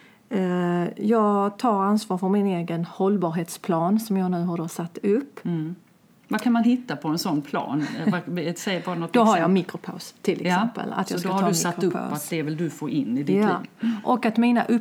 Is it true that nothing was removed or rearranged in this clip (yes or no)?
yes